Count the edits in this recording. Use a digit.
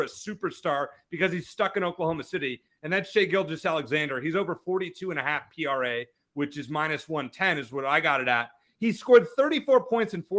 0